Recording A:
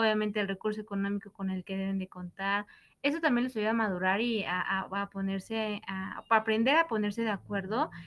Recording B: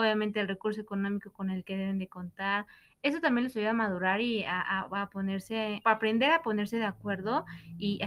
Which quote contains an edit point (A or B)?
B